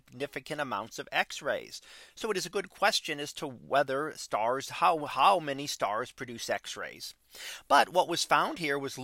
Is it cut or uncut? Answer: uncut